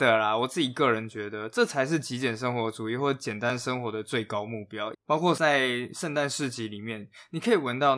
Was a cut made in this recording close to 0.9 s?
no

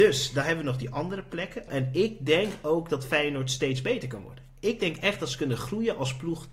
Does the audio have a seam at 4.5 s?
no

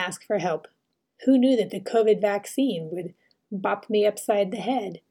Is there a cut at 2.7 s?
no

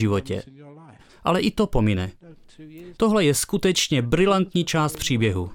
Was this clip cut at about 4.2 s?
no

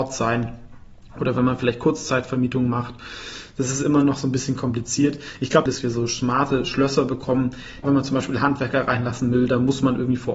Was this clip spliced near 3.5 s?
no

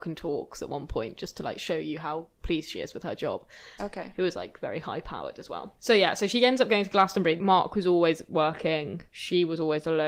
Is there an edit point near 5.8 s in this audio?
no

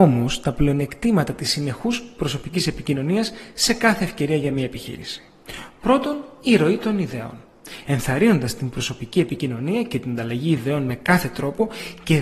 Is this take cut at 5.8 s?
no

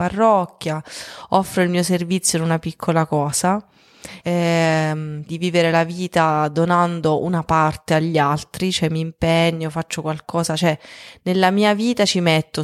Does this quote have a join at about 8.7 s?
no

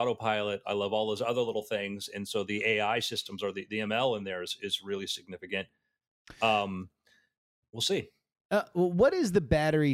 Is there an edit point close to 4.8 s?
no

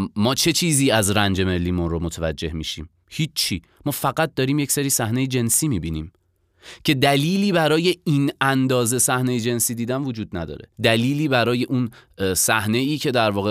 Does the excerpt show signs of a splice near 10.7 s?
yes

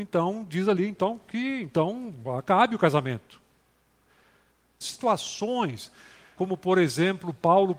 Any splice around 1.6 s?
no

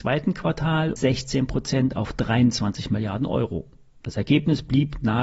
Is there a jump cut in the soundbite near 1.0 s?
yes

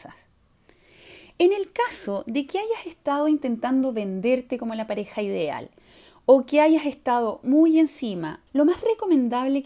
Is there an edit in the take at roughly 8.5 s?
yes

